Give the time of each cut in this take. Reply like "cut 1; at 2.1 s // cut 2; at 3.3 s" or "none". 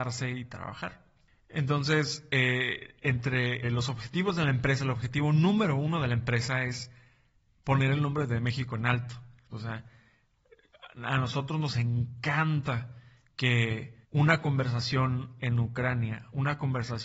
cut 1; at 3.6 s // cut 2; at 9.5 s // cut 3; at 14.0 s